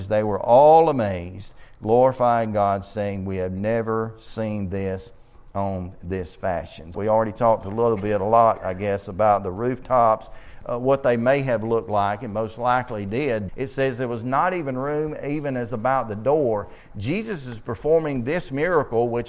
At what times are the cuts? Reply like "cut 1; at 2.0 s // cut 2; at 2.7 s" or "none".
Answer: cut 1; at 6.9 s // cut 2; at 13.5 s